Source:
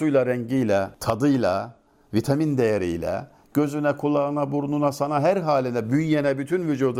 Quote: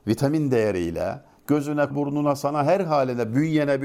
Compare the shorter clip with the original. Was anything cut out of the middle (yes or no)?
yes